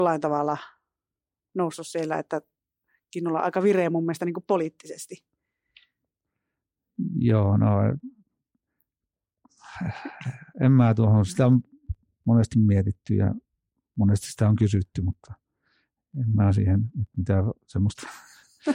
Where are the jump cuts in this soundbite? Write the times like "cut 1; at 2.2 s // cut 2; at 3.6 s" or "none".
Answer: none